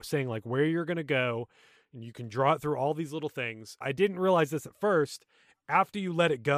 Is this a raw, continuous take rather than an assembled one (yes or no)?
no